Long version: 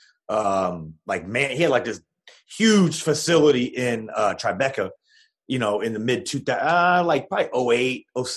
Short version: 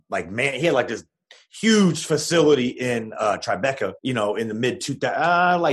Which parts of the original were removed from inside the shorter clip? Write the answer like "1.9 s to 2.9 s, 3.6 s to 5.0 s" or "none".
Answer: 4.9 s to 5.4 s